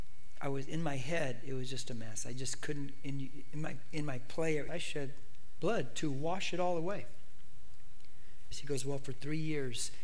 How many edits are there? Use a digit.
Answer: 2